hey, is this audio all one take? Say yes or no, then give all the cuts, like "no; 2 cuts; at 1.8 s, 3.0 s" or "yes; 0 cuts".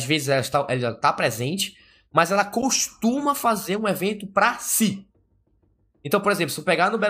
yes; 0 cuts